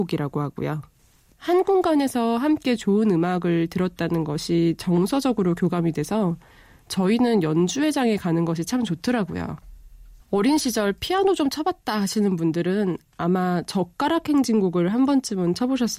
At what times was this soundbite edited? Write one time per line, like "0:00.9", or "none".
0:01.3
0:10.2